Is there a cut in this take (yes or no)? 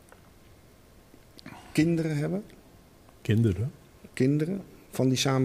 no